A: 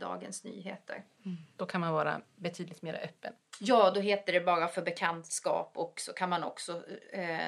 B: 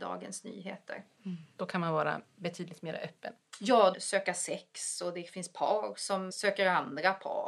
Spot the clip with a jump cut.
B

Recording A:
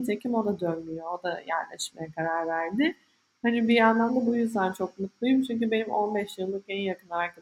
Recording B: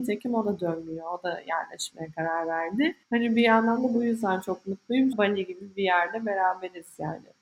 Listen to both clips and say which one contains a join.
B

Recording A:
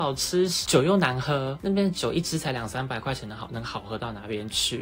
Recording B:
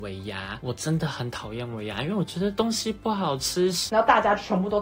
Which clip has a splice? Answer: B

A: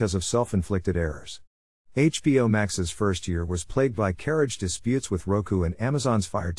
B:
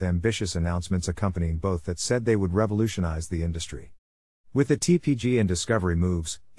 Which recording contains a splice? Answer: B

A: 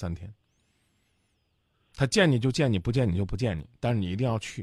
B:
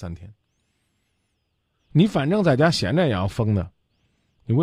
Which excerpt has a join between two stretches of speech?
B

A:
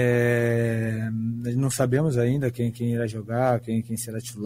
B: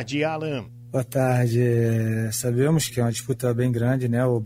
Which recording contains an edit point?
B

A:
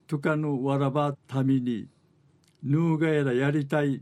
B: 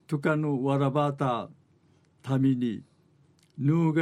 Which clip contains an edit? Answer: A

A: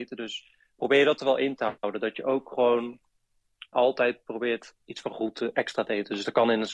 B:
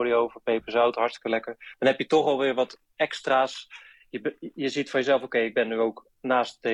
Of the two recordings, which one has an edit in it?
A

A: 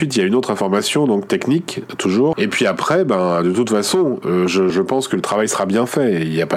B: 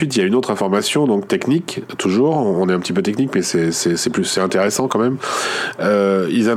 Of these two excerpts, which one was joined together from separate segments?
A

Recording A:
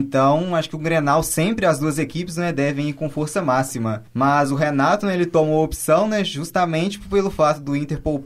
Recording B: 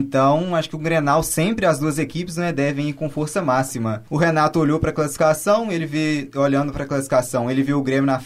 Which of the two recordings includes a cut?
B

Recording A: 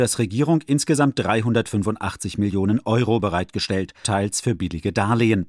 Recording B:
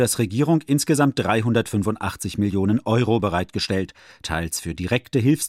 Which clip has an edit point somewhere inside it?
A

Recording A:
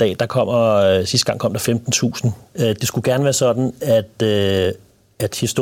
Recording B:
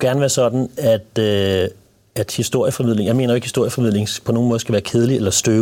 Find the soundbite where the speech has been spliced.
A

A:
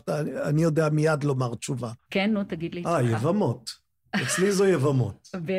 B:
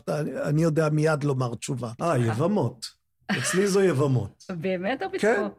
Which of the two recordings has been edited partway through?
B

